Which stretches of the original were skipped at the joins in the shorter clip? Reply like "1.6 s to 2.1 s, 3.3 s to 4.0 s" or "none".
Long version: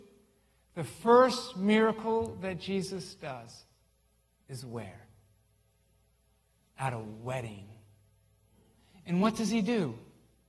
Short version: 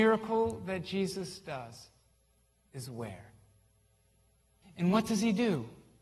6.4 s to 8.9 s